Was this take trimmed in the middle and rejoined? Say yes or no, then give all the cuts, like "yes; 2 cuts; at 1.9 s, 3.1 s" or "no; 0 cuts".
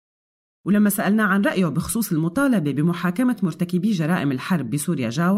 no; 0 cuts